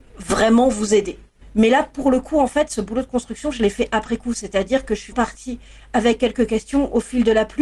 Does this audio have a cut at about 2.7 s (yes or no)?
no